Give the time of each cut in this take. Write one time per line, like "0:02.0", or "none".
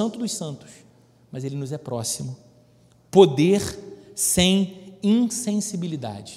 none